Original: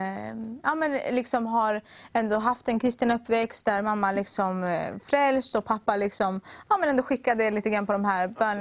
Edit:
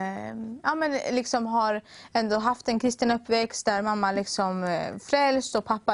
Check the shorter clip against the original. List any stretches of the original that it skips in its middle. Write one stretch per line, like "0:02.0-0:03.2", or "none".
none